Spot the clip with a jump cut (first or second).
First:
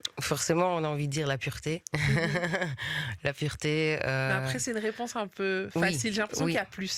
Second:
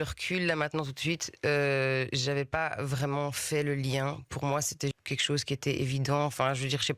second